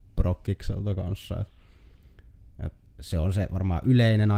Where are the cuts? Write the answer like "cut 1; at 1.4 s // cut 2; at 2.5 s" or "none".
none